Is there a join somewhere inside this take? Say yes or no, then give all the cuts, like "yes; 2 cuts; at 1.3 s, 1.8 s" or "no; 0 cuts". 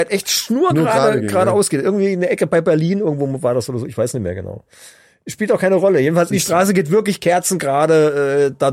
yes; 1 cut; at 6.3 s